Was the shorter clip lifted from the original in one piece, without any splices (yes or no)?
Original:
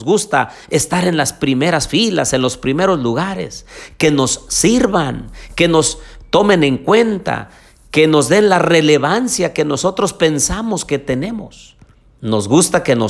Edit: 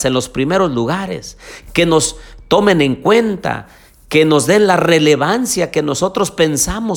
no